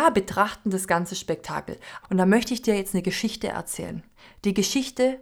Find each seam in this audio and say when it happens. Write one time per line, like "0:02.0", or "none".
0:02.0